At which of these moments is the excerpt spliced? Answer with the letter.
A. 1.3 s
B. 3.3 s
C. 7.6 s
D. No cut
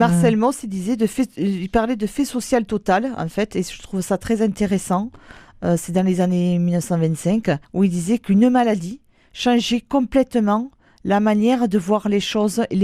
C